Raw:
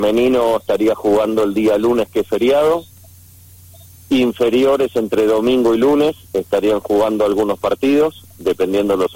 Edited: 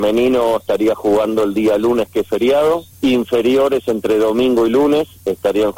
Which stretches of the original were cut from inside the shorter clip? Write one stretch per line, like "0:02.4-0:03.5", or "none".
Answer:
0:02.9-0:04.0

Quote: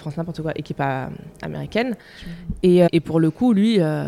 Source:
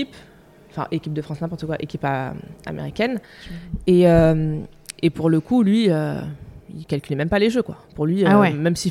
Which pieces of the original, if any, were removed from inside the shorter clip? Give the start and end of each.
0:04.1-0:05.0

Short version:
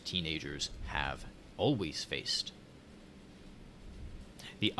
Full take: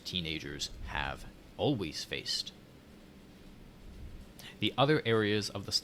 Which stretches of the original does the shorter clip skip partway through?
none

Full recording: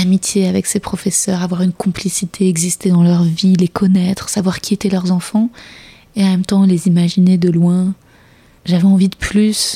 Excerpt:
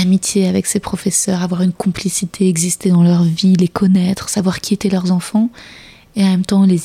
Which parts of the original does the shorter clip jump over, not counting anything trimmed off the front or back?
none

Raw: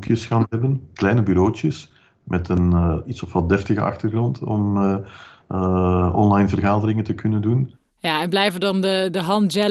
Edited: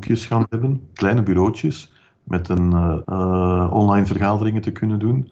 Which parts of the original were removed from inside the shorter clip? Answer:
0:03.0-0:05.5

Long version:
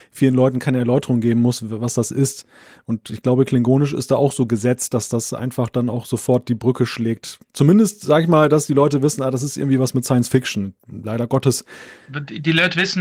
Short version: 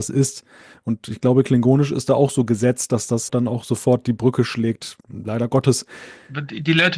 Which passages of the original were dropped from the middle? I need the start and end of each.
0:05.3-0:05.7
0:07.4-0:10.8

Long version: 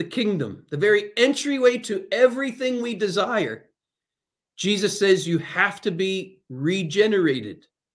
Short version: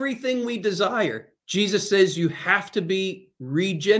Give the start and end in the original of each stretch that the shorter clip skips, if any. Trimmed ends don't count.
0:03.7-0:04.5

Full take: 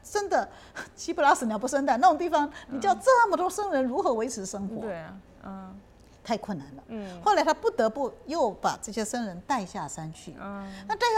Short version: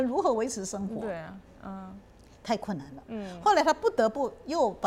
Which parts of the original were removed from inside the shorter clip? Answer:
none

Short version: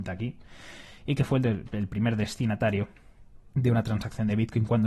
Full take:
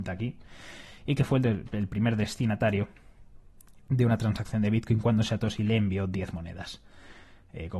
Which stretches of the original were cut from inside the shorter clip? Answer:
0:03.5-0:03.8

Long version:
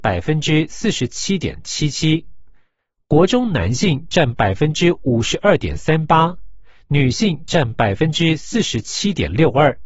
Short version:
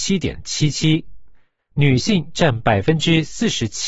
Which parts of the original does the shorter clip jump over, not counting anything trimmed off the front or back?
0:02.9-0:06.8

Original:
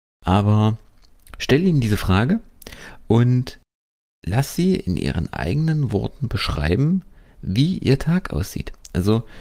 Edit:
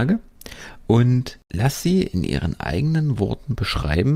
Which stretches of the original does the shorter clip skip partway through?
0:03.6-0:04.2

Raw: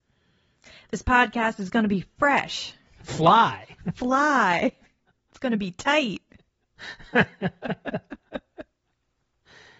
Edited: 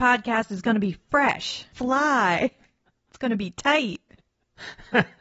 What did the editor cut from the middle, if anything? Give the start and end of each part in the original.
0:02.8-0:03.9

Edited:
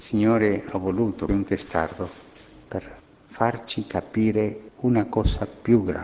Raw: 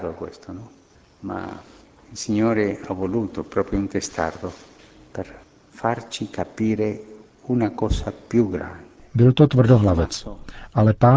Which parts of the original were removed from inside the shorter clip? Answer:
0:03.4-0:03.7
0:07.1-0:07.3

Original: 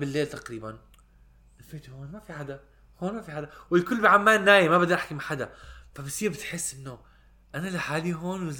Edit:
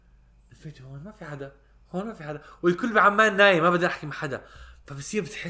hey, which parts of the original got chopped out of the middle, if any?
none

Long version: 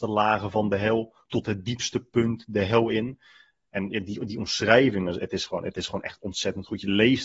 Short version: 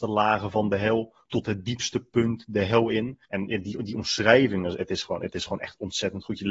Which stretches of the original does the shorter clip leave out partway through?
0:03.2-0:03.7

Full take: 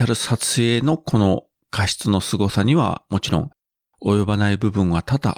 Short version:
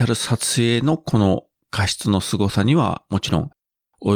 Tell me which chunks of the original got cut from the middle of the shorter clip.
none

